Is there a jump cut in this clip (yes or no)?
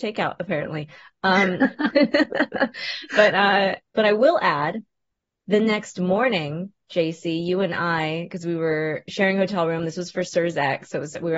no